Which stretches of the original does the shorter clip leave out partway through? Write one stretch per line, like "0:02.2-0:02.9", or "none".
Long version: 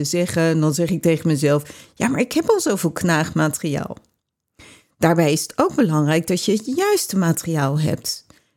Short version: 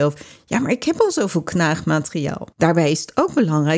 0:04.0-0:04.9